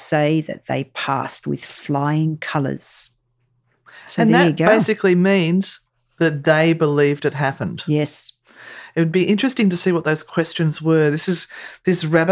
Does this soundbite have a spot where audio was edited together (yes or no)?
no